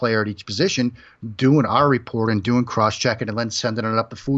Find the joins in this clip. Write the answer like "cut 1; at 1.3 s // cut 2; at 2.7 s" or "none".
none